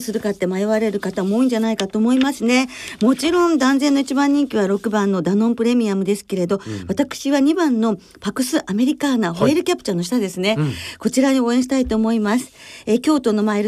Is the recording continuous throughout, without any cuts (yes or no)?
yes